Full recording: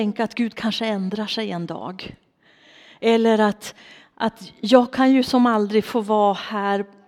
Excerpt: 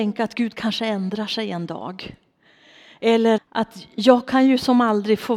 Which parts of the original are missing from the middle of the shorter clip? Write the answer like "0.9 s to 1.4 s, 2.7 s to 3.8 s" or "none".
3.4 s to 4.0 s